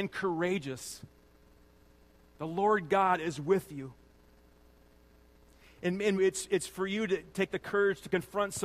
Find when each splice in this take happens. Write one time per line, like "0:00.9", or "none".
0:06.2